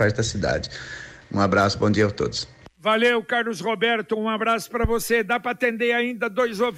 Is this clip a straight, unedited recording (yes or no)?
no